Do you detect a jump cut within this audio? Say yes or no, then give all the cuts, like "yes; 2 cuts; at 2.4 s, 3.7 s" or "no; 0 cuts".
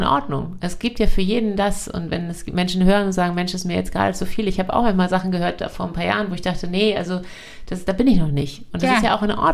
no; 0 cuts